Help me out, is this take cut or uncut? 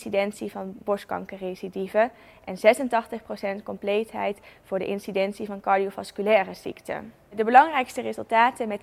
uncut